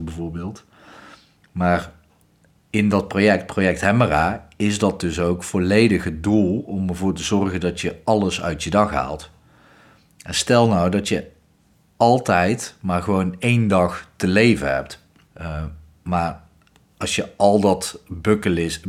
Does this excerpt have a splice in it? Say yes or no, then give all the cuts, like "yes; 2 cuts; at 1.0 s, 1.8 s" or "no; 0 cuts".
yes; 1 cut; at 15.3 s